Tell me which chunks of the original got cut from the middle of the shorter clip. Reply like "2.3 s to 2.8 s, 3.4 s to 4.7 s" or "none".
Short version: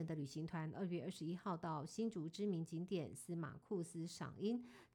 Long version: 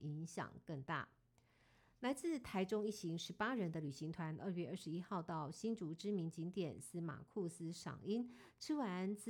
none